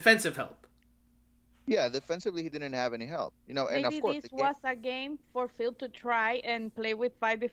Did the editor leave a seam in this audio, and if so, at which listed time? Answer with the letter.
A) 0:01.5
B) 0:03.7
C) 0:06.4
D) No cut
C